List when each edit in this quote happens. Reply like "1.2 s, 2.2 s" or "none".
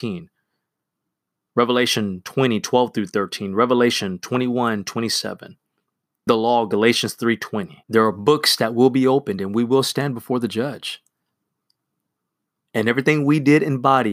6.3 s, 7.8 s